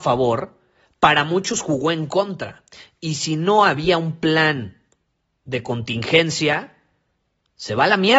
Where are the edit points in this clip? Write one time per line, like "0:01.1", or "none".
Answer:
none